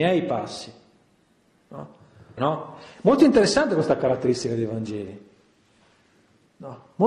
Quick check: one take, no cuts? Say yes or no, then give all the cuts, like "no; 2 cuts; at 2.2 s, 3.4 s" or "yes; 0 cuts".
no; 1 cut; at 2.4 s